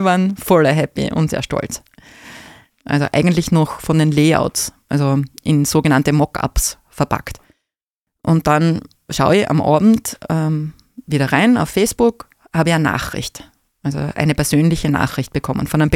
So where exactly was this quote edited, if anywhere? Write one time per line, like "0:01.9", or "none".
0:01.3
0:02.7